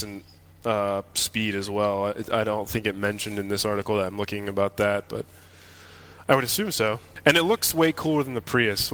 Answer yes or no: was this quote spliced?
no